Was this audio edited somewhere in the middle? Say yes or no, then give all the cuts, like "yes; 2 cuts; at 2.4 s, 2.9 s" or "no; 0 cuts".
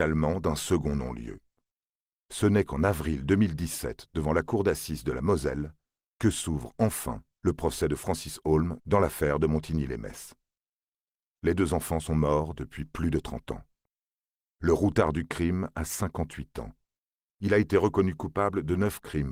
no; 0 cuts